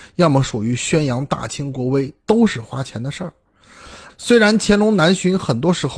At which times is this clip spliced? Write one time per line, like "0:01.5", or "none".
0:04.1

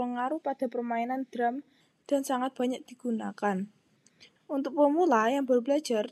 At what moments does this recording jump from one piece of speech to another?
0:04.4

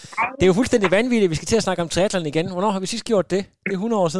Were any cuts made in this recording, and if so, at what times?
none

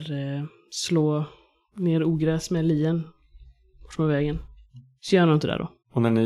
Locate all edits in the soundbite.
none

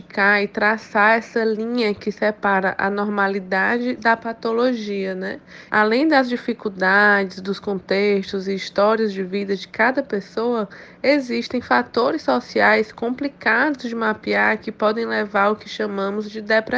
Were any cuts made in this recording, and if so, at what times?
0:05.7

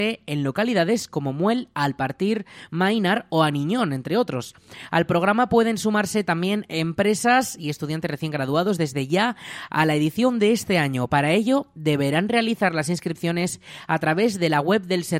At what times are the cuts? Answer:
none

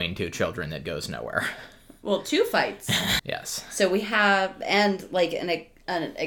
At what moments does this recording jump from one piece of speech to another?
0:03.2

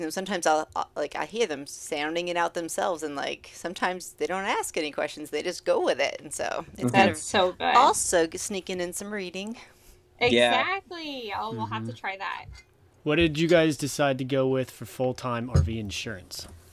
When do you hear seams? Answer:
none

